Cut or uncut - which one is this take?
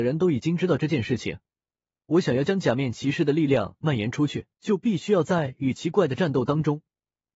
cut